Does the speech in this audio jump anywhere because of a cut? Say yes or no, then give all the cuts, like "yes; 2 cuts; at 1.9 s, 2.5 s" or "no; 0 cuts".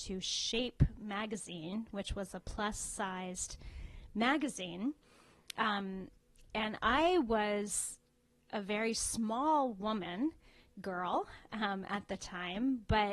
no; 0 cuts